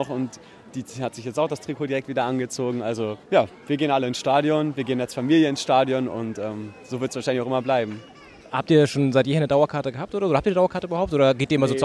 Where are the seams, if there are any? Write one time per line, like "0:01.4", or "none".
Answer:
0:03.2